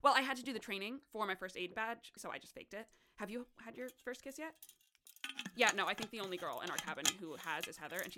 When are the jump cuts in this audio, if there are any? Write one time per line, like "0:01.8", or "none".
0:02.2